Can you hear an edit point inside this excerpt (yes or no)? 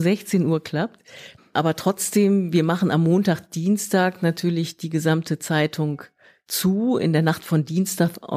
yes